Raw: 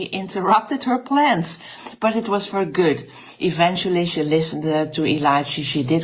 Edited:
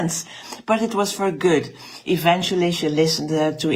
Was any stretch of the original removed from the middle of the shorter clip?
no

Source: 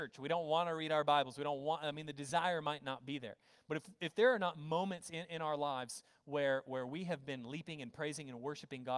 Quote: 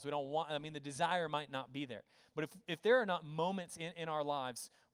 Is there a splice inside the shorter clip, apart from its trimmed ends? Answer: no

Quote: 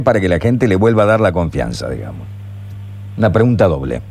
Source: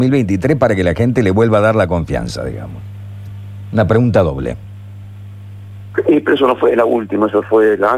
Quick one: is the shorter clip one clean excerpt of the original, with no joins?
yes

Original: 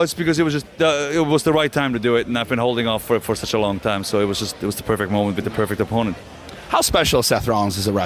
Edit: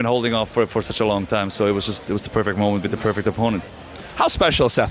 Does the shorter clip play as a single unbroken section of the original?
yes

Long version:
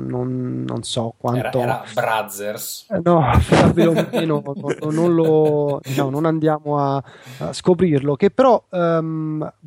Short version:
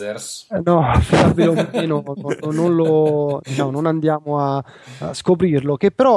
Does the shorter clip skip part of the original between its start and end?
no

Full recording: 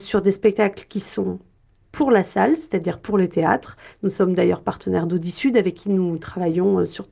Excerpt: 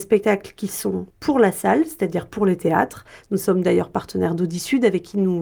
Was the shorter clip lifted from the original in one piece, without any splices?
no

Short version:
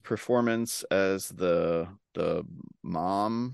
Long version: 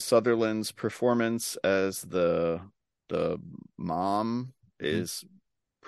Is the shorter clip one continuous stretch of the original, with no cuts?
no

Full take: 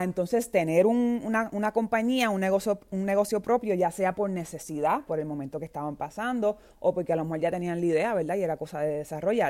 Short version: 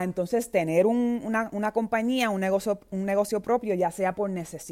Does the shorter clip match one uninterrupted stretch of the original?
yes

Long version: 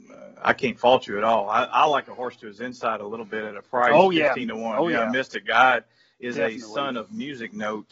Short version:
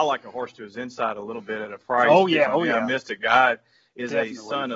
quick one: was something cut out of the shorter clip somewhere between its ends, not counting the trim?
yes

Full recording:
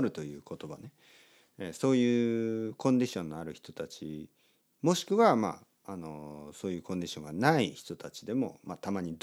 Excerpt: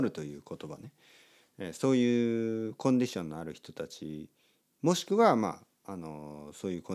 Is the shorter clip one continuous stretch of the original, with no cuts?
yes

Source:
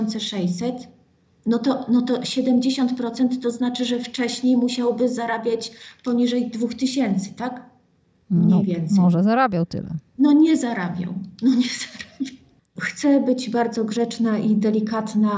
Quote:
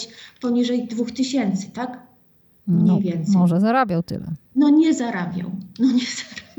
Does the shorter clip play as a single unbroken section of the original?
yes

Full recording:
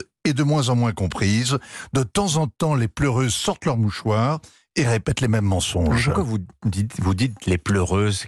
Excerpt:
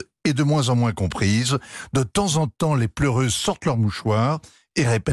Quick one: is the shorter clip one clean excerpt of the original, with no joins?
yes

